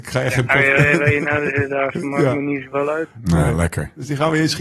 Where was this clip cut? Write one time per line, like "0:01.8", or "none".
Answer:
none